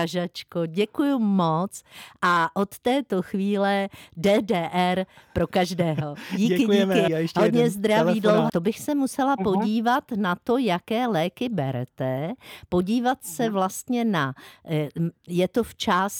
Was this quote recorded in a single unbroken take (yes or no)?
no